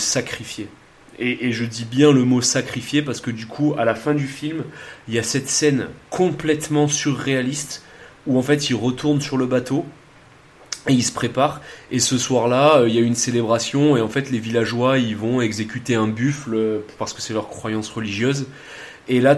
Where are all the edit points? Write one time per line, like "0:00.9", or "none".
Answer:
none